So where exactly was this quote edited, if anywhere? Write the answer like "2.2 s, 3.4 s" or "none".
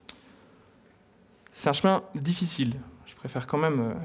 none